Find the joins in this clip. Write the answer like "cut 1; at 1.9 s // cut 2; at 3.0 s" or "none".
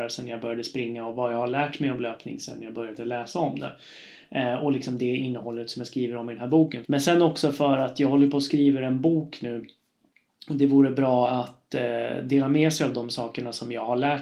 cut 1; at 6.8 s